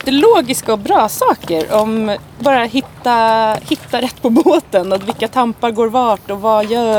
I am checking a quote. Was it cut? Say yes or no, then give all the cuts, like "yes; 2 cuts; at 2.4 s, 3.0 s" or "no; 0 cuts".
no; 0 cuts